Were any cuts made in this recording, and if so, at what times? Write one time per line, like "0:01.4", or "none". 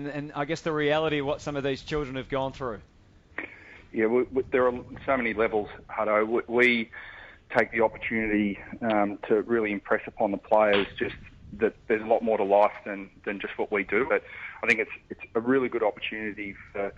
0:14.1